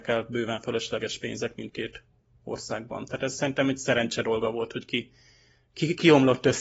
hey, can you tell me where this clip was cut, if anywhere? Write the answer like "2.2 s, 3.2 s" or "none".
none